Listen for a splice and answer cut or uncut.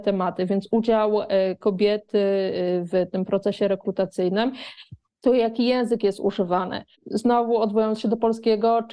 cut